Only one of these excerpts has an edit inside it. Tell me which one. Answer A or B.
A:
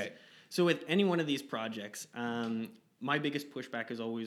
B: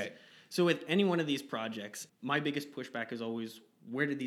B